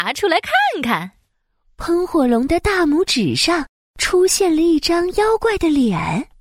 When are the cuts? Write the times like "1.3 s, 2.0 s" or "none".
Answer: none

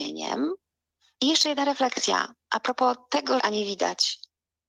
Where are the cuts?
1.2 s, 3.4 s

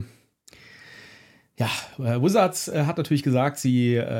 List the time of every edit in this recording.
none

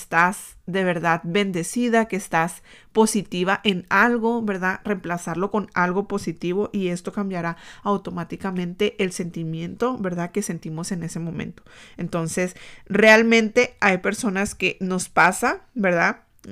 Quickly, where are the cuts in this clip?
none

